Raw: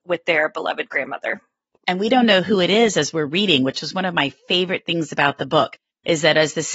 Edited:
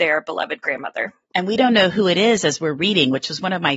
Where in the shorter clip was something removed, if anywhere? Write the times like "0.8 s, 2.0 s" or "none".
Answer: 1.2 s